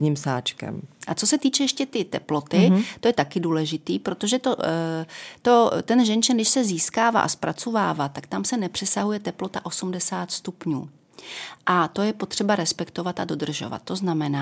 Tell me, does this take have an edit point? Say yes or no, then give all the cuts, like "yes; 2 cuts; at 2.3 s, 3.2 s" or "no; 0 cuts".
no; 0 cuts